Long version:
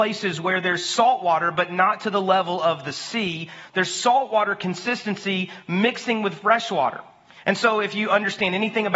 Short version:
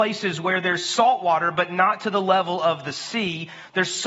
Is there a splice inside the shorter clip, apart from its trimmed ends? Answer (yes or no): no